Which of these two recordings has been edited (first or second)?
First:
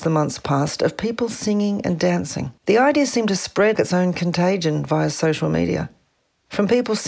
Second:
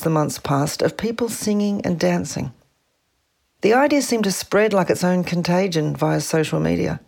first